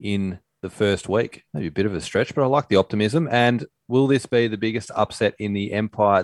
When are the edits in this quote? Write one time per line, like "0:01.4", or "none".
0:01.5

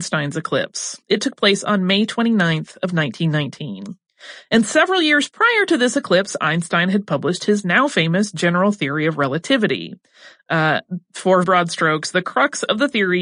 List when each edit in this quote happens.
0:11.4

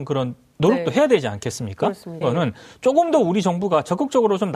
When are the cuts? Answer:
0:02.2

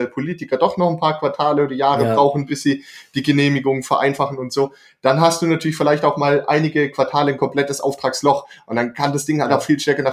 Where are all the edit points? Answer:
none

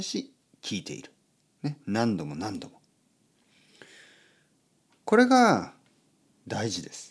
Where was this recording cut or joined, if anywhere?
none

